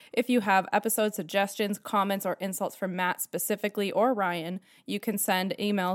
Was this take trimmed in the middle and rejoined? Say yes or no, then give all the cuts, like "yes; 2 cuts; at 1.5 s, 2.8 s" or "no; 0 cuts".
no; 0 cuts